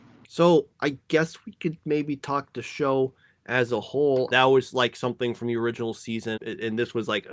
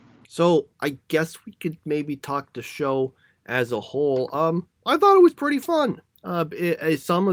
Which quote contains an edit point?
first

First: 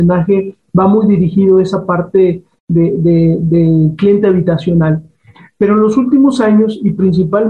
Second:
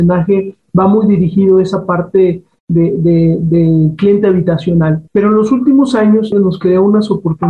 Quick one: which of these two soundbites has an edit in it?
second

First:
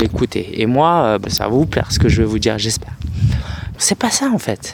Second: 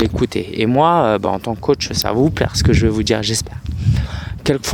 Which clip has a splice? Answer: first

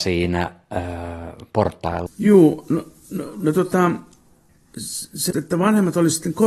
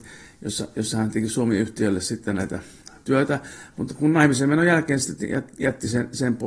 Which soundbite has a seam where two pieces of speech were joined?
first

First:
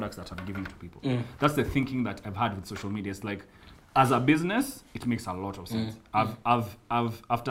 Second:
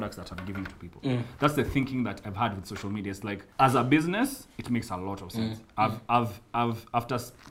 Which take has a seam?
second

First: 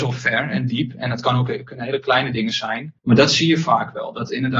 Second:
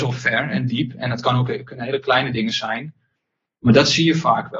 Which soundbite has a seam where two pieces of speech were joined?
first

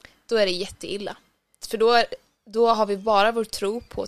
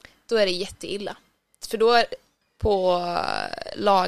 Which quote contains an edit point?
second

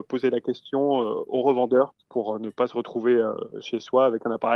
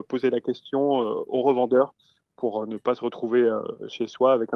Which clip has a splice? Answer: first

